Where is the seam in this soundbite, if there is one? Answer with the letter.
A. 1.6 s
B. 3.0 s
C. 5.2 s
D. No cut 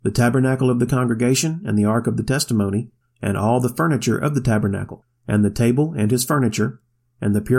B